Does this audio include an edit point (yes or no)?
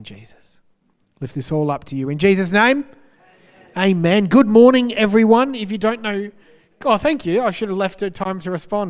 no